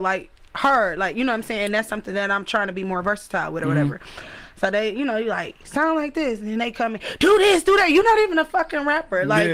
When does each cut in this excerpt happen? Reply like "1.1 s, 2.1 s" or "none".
none